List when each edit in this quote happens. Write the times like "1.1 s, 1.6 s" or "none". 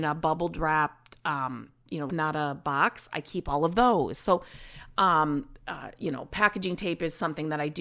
2.1 s